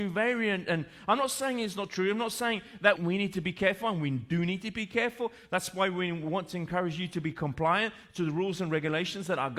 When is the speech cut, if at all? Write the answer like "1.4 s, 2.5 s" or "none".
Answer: 3.0 s